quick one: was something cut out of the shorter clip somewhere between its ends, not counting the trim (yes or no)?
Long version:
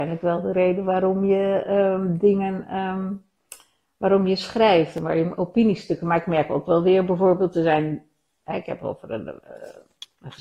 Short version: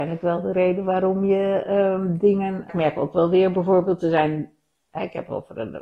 yes